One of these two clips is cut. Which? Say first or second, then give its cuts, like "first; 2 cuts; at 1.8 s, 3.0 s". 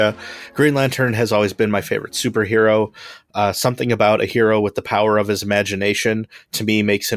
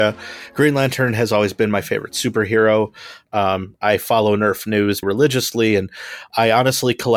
second; 2 cuts; at 3.2 s, 5.0 s